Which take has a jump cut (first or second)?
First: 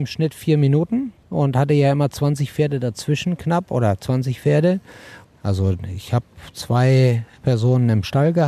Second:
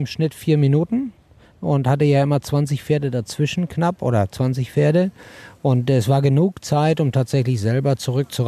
first